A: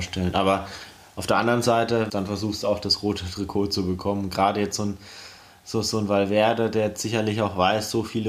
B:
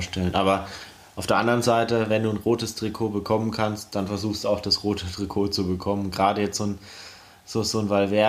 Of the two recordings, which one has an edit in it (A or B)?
A